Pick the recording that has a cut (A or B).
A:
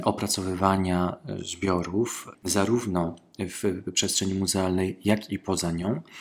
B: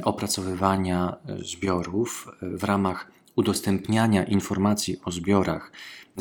A